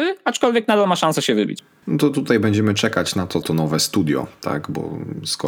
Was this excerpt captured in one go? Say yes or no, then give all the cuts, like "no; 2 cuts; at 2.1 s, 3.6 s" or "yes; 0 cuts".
no; 2 cuts; at 1.8 s, 3.4 s